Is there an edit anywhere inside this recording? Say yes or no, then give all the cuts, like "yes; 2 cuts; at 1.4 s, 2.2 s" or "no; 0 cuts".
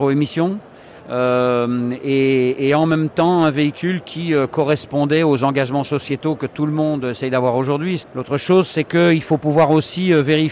yes; 2 cuts; at 1.0 s, 8.0 s